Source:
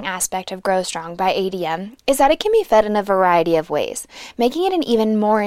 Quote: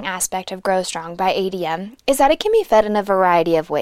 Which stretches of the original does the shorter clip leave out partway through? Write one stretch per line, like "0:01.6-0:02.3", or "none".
none